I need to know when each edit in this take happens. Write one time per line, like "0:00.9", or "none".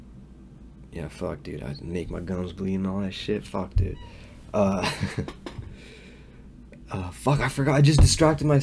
none